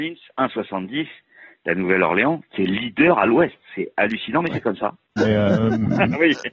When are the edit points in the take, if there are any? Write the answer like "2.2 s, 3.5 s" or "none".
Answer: 5.2 s